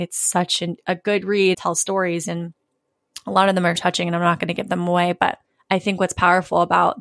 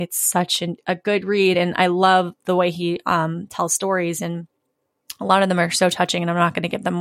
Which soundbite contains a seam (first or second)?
first